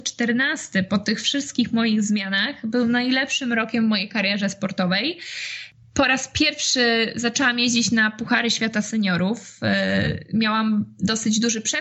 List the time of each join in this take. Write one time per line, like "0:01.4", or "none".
none